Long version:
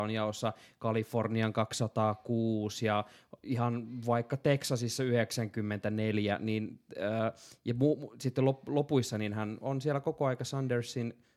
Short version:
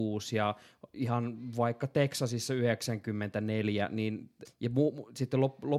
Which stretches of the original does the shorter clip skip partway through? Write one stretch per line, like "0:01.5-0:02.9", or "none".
0:06.9-0:07.5